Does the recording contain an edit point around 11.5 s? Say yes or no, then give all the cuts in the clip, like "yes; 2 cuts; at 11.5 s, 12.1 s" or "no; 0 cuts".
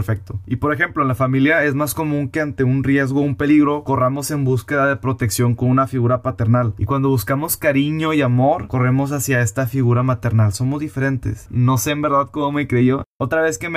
yes; 1 cut; at 11.5 s